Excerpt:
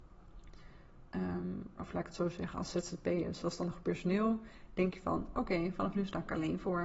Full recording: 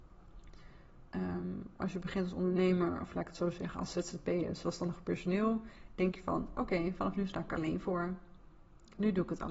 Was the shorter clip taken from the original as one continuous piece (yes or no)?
no